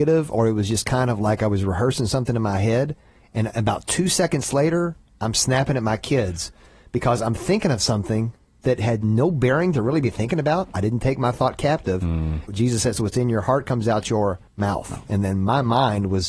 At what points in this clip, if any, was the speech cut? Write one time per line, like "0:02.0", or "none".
0:12.5
0:14.5